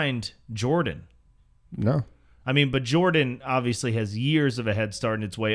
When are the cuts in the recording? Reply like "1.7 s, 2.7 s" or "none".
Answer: none